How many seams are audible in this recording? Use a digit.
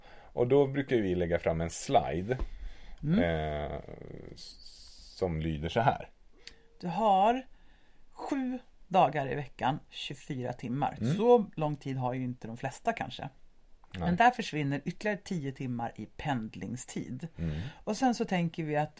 2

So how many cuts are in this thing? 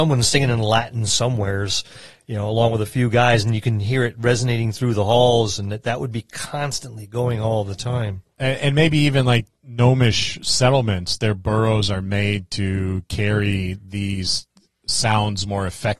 0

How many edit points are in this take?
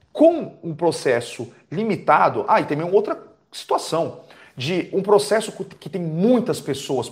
0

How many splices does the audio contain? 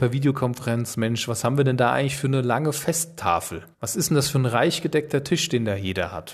1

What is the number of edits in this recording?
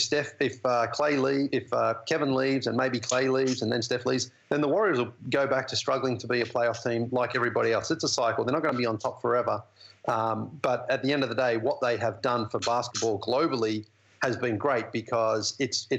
0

